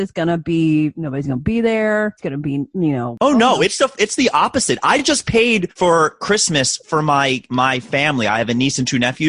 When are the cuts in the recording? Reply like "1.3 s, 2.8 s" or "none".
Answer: none